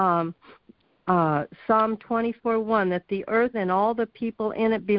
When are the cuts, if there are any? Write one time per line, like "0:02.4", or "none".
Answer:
0:03.5